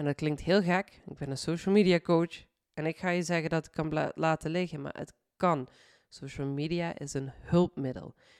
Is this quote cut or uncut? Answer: uncut